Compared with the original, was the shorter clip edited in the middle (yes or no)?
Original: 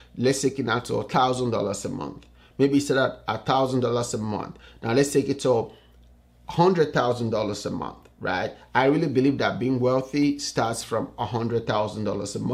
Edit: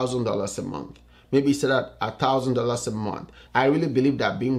yes